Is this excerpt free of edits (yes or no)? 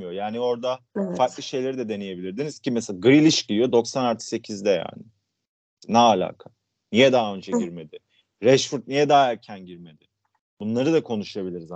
yes